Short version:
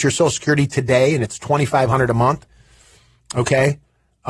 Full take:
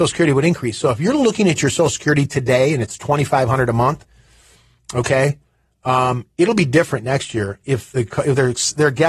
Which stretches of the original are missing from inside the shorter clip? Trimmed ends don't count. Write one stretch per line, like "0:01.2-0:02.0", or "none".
none